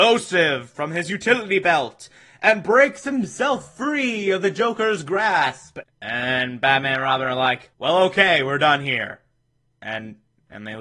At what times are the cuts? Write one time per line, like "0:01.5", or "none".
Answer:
0:05.8
0:07.7